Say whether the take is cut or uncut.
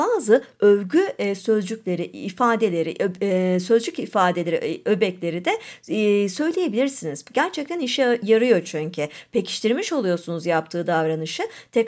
uncut